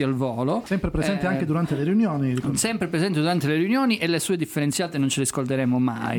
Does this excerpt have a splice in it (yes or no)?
no